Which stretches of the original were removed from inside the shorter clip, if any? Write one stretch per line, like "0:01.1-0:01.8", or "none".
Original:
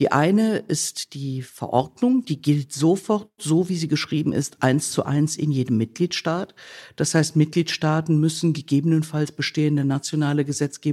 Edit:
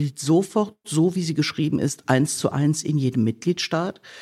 none